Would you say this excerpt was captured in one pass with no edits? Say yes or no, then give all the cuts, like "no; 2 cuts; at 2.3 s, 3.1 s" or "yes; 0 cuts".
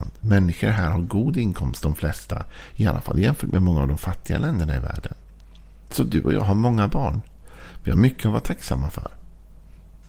yes; 0 cuts